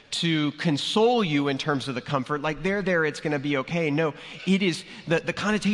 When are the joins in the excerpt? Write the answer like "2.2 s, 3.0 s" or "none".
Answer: none